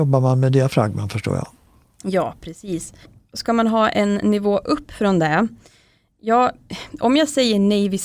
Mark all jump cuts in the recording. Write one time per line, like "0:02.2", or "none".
none